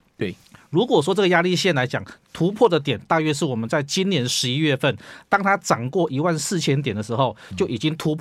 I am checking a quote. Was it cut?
no; 0 cuts

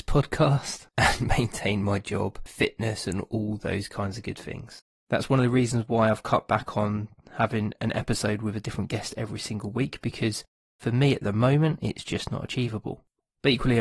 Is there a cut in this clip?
no; 0 cuts

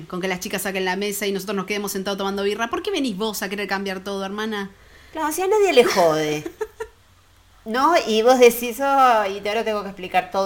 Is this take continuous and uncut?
yes; 0 cuts

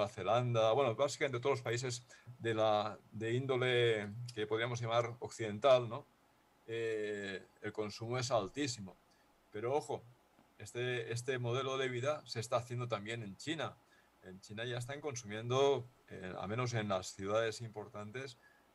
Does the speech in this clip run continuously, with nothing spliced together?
yes; 0 cuts

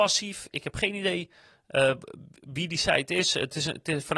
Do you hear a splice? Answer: no; 0 cuts

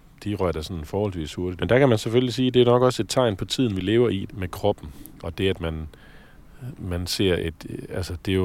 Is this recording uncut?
no; 2 cuts; at 1.6 s, 4.3 s

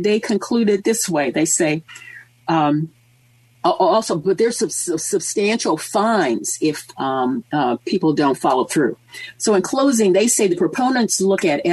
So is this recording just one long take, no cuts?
yes; 0 cuts

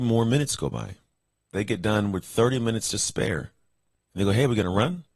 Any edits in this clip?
no; 0 cuts

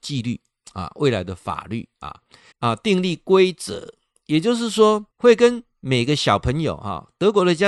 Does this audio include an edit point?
yes; 2 cuts; at 2.5 s, 5.1 s

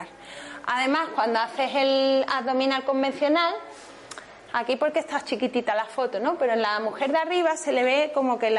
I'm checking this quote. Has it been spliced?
no; 0 cuts

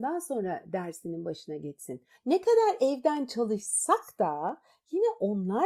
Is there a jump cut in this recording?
yes; 1 cut; at 2.1 s

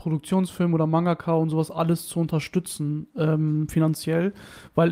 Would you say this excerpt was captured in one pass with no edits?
yes; 0 cuts

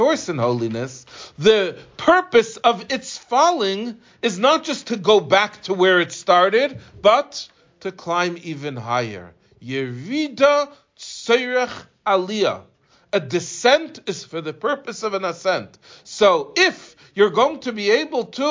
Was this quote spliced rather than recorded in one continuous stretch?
no; 0 cuts

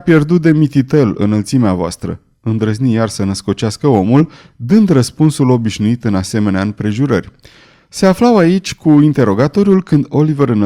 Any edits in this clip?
no; 0 cuts

